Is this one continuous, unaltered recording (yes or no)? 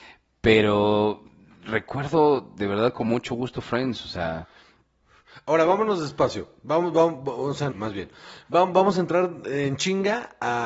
no